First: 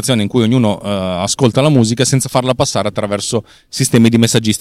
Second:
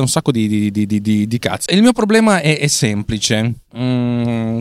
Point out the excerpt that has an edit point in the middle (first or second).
second